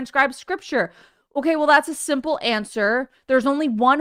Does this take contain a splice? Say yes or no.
no